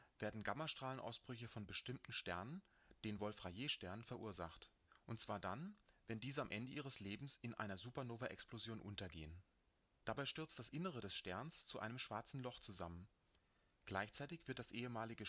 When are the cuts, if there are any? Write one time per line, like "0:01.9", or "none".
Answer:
none